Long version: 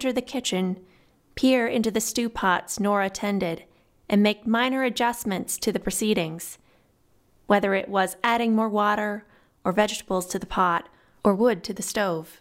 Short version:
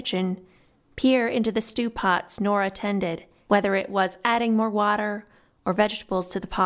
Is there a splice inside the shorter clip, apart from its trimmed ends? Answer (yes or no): yes